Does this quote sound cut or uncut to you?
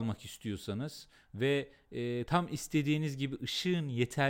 cut